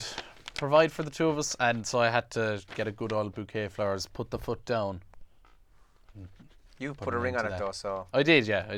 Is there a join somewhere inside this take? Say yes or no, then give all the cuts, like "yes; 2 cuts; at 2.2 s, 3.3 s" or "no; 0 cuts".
no; 0 cuts